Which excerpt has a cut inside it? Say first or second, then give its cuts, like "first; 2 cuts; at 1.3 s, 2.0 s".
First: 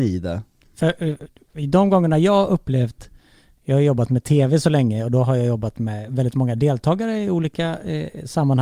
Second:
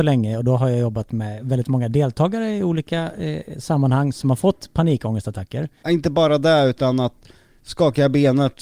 second; 1 cut; at 5.8 s